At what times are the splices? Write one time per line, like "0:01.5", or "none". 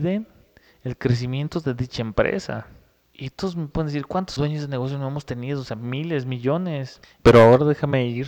0:07.2